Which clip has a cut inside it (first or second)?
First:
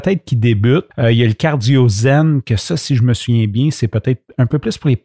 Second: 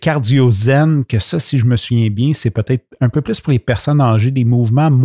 first